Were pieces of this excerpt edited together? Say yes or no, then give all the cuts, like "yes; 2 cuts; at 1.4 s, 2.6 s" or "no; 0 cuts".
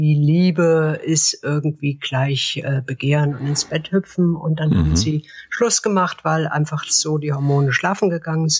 no; 0 cuts